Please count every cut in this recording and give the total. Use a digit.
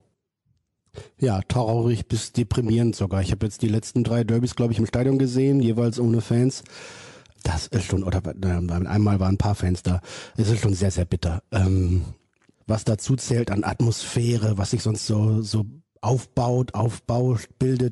1